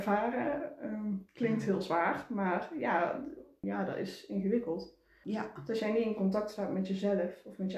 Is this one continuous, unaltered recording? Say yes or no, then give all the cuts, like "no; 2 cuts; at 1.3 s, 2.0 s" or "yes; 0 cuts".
no; 2 cuts; at 3.6 s, 5.2 s